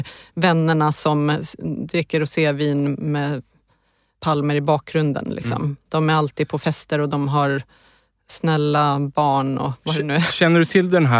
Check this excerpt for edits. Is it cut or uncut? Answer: uncut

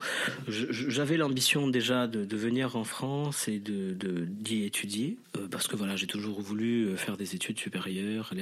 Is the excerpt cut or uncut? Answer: uncut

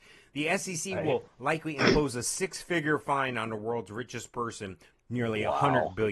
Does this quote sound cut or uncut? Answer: cut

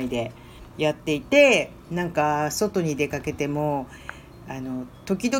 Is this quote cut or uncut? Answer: uncut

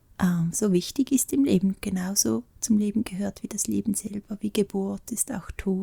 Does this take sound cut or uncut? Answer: uncut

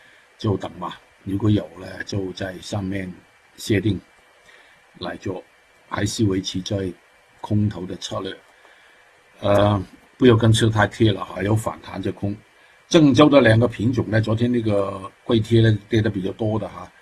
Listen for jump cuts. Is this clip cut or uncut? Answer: cut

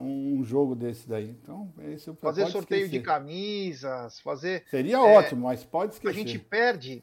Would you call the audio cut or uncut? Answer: uncut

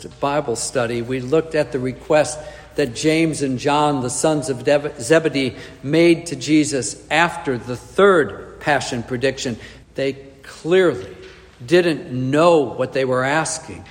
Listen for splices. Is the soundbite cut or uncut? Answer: cut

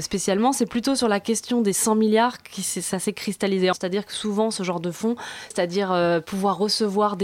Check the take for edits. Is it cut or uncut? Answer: cut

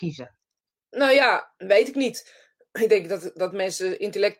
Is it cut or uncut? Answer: uncut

